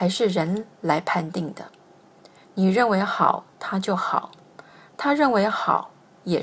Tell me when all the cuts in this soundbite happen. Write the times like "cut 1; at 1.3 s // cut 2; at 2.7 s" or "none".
none